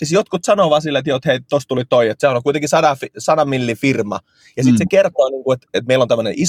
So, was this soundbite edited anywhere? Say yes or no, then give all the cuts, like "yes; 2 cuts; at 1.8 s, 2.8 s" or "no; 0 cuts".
no; 0 cuts